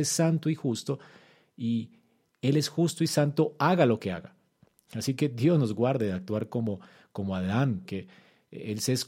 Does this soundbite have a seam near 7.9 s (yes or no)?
yes